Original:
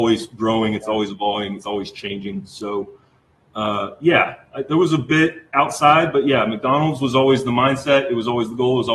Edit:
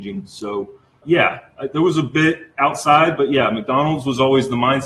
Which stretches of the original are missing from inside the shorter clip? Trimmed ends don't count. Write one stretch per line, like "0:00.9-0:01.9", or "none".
0:03.2-0:04.0